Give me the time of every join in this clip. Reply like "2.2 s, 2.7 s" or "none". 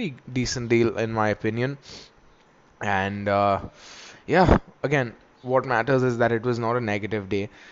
none